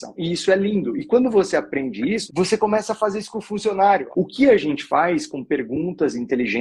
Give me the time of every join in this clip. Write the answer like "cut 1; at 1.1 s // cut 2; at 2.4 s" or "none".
cut 1; at 2.3 s // cut 2; at 4.1 s